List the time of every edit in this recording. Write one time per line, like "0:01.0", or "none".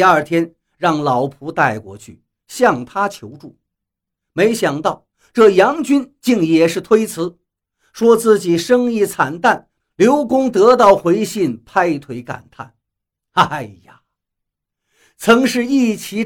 0:09.8